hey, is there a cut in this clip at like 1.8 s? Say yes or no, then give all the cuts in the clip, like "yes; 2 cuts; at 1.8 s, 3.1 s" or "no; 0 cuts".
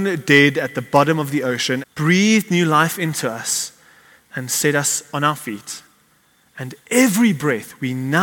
yes; 1 cut; at 1.8 s